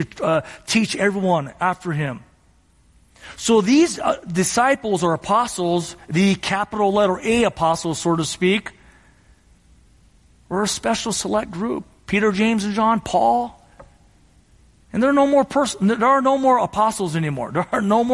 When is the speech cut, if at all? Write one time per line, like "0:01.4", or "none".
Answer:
0:14.8